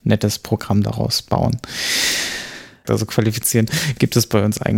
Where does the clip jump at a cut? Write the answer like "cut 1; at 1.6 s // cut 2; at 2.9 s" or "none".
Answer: cut 1; at 2.8 s